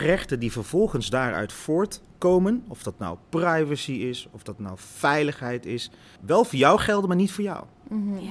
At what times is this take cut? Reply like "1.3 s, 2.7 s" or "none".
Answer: 6.2 s